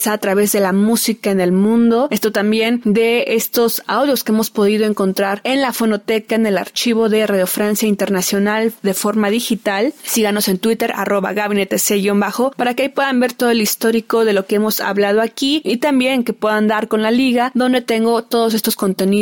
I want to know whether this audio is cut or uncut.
uncut